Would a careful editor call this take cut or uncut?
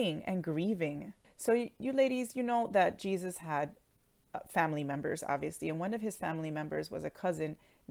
cut